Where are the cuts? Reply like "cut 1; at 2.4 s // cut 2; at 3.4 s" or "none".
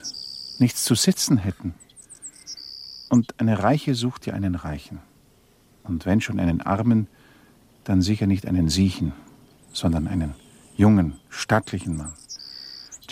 none